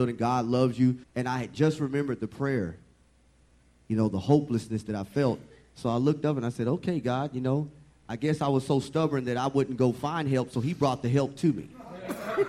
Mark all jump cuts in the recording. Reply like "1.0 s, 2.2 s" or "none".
1.0 s